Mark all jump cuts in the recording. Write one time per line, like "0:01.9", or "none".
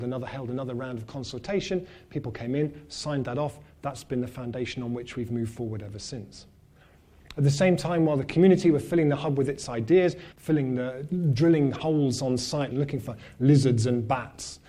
0:10.3
0:12.7